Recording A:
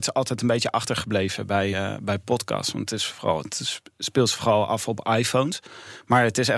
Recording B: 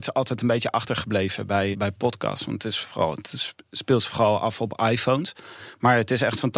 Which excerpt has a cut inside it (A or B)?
B